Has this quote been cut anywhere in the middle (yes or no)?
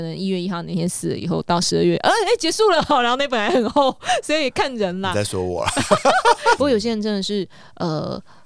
yes